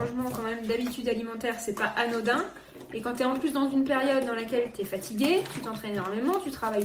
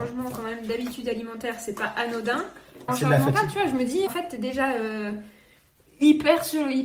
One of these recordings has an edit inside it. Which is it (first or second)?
second